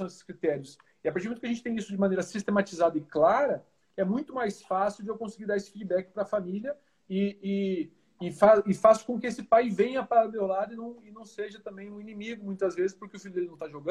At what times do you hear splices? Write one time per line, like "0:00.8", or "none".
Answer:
none